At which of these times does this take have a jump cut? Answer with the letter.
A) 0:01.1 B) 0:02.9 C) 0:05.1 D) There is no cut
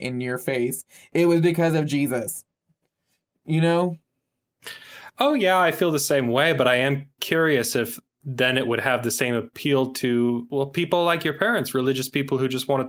D